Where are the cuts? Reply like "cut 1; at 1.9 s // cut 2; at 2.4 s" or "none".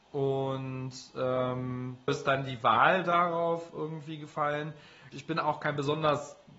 cut 1; at 2.1 s // cut 2; at 5.1 s